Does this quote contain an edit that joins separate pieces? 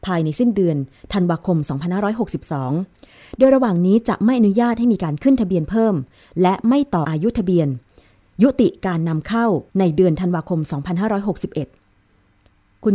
yes; 2 cuts; at 7.0 s, 9.7 s

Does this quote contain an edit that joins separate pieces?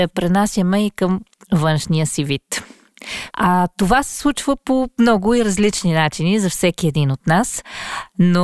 yes; 1 cut; at 3.3 s

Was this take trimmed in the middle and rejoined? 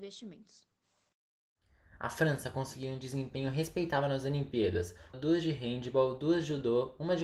yes; 1 cut; at 5.1 s

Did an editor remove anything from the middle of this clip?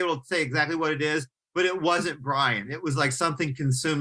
no; 0 cuts

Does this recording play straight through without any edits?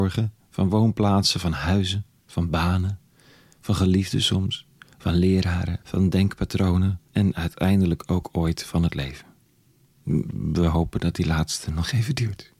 no; 2 cuts; at 5.8 s, 7.1 s

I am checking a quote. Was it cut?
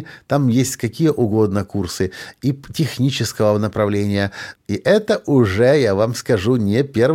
yes; 1 cut; at 4.5 s

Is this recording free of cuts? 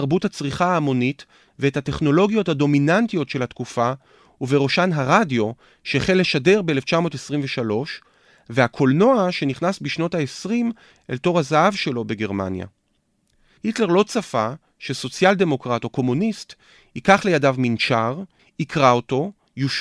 no; 2 cuts; at 13.6 s, 18.4 s

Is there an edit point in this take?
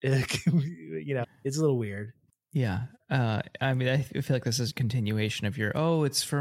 yes; 2 cuts; at 1.2 s, 4.7 s

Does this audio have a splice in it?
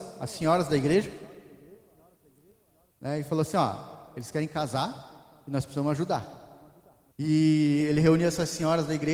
yes; 1 cut; at 7.1 s

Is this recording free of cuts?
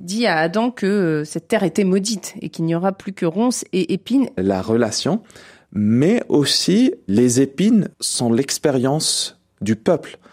no; 2 cuts; at 4.4 s, 7.9 s

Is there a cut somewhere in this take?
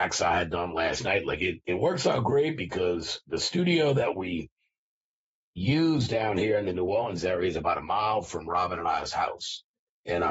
no; 0 cuts

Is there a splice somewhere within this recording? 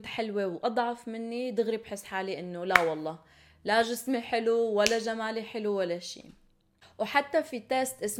no; 0 cuts

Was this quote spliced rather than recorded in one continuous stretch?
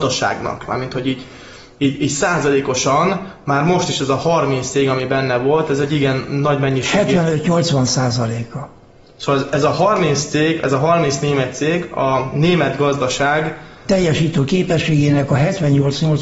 no; 0 cuts

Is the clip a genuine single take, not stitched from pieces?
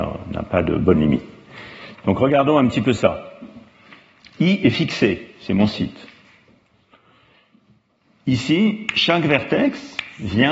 no; 1 cut; at 1.9 s

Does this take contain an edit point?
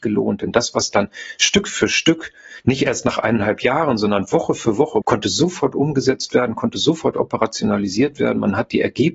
yes; 1 cut; at 5.0 s

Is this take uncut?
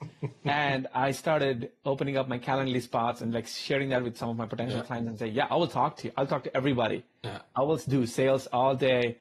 yes; 0 cuts

